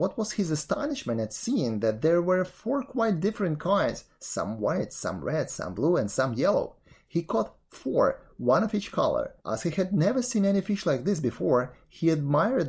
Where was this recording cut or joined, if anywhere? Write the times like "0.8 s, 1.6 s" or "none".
9.4 s